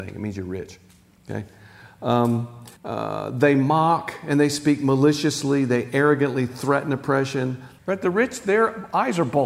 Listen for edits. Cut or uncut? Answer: cut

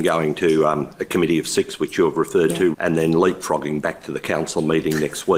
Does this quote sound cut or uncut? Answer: cut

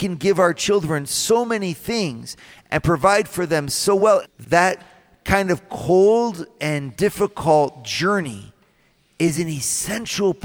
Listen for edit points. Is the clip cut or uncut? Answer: cut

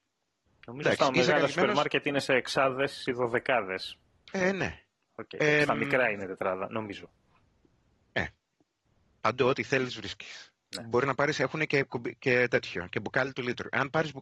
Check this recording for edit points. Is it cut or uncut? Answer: uncut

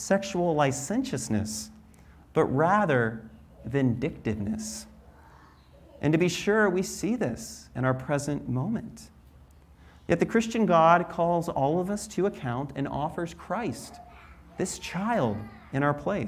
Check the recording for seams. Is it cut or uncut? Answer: uncut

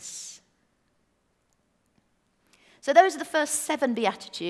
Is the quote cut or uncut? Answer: uncut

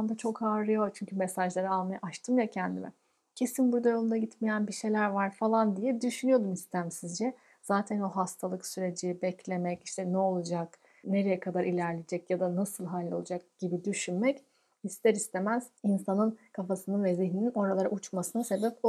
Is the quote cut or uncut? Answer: cut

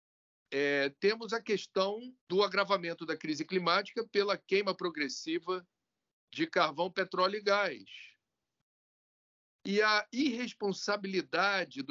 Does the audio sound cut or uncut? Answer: cut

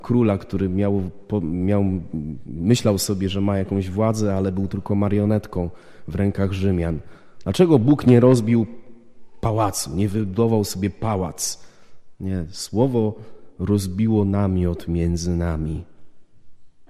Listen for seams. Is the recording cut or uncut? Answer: uncut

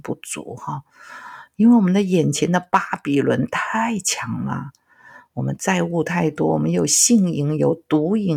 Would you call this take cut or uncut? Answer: uncut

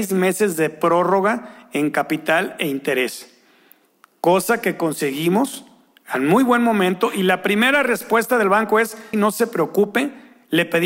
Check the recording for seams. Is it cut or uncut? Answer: cut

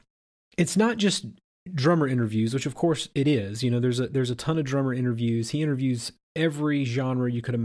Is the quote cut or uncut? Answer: uncut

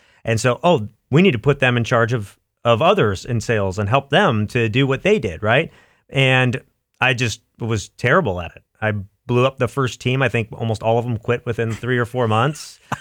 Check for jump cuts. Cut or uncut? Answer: uncut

